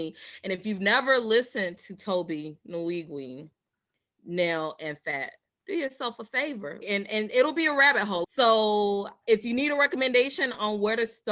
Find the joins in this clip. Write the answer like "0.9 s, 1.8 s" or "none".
8.2 s